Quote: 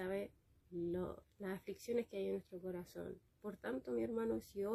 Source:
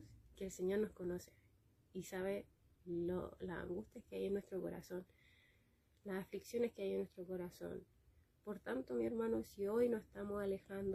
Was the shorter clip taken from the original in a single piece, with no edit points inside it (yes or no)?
no